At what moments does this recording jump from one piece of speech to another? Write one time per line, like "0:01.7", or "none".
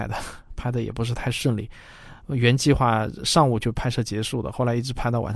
none

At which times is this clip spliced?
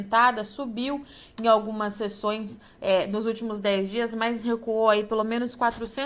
none

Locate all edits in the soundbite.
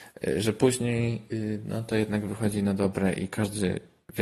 none

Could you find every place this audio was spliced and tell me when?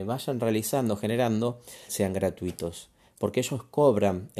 0:01.9

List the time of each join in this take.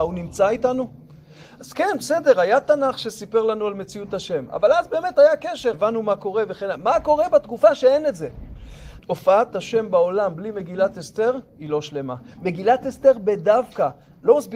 0:05.7
0:09.0

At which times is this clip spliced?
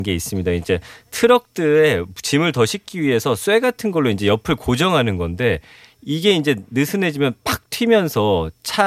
none

